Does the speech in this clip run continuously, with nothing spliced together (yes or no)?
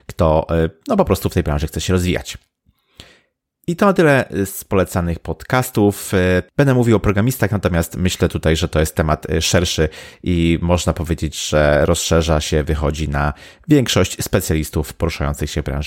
no